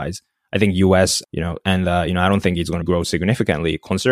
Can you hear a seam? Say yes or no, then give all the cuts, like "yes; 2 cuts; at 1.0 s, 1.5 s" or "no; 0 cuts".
yes; 2 cuts; at 1.2 s, 2.8 s